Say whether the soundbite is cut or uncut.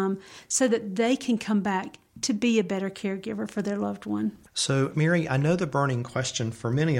cut